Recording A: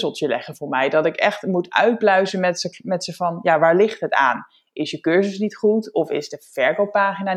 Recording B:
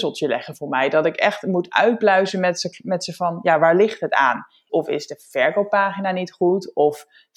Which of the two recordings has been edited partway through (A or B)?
B